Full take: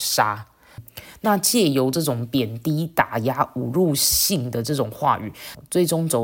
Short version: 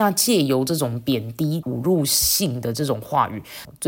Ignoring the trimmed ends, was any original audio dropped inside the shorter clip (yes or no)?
yes